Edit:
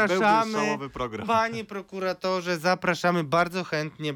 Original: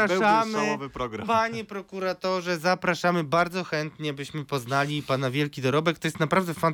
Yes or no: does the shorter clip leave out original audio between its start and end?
no